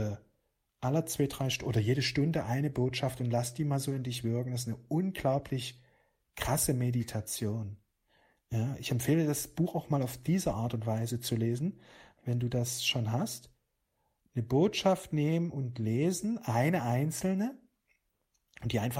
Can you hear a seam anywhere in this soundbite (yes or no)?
yes